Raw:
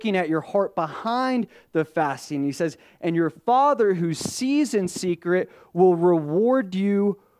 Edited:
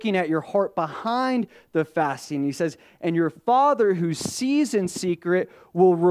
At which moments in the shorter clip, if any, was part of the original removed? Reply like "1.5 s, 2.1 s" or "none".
none